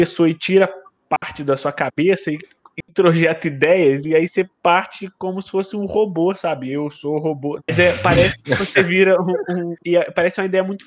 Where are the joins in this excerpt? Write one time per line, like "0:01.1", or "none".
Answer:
0:07.6
0:09.8

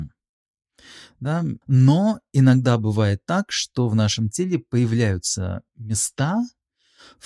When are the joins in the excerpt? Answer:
0:01.6

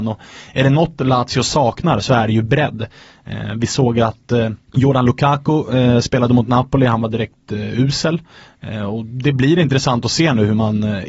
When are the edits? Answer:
0:04.6

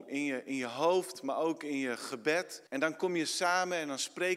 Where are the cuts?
0:02.7

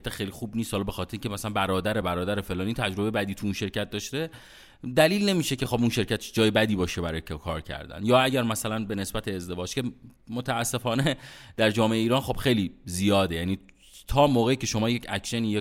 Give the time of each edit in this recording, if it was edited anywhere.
0:02.0

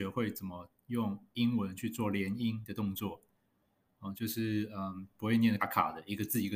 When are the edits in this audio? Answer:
0:05.6

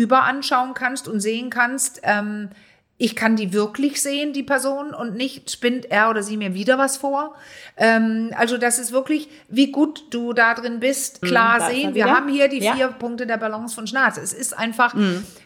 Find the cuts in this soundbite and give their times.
0:11.2

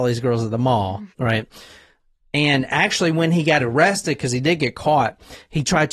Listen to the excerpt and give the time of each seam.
0:01.1

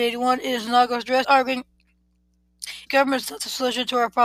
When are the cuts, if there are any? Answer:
0:01.2
0:02.9

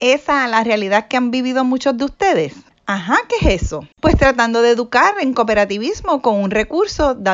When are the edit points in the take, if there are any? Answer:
0:02.7
0:03.9

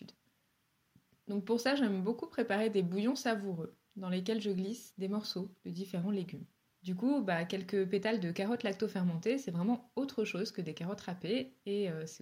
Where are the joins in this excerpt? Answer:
0:06.7

